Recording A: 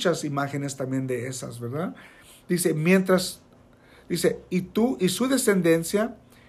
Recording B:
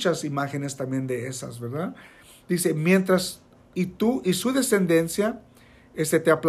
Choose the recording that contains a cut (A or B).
B